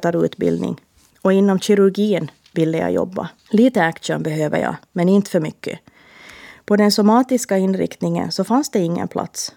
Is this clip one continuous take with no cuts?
no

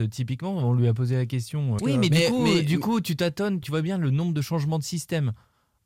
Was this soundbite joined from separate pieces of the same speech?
yes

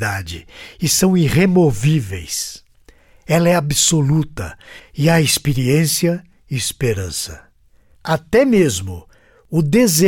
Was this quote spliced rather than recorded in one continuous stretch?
yes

